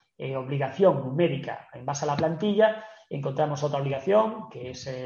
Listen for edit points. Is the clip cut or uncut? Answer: uncut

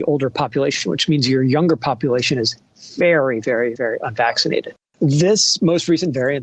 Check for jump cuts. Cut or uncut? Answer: uncut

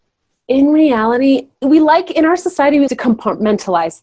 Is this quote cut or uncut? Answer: cut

